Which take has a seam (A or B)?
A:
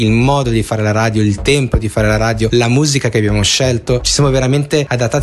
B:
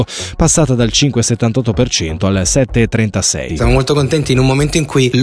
B